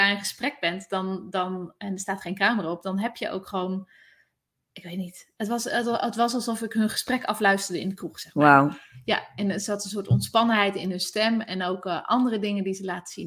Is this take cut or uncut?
uncut